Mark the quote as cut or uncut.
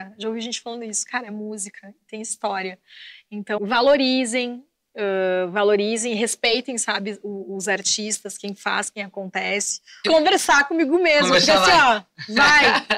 cut